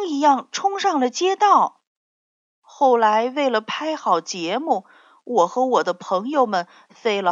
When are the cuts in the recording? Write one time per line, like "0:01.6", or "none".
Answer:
0:02.4